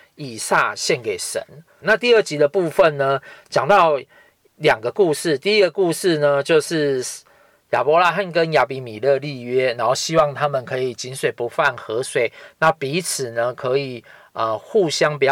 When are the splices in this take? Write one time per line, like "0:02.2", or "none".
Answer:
0:01.8